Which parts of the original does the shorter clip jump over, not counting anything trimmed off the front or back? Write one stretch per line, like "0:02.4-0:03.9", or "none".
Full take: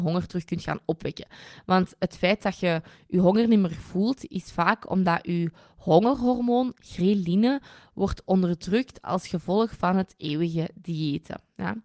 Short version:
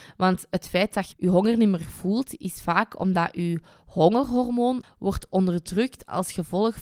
0:02.6-0:03.0
0:06.7-0:07.8